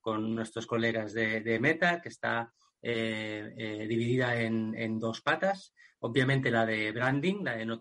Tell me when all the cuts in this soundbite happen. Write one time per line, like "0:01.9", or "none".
none